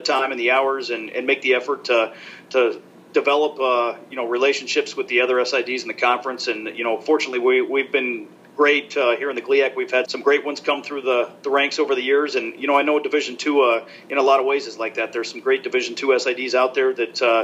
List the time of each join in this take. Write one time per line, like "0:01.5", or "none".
0:10.0